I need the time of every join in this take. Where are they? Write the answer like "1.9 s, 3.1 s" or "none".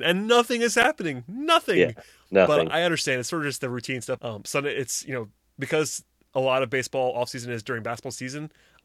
4.2 s